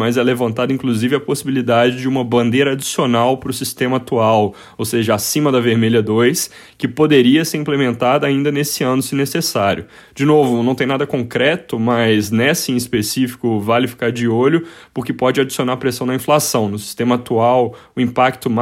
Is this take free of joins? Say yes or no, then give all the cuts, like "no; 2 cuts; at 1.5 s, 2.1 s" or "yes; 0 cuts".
yes; 0 cuts